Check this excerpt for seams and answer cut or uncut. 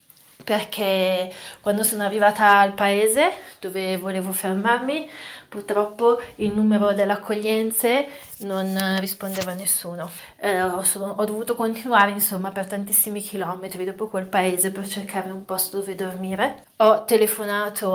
uncut